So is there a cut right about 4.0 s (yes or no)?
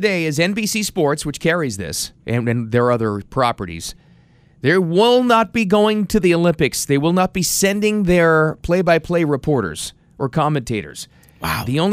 no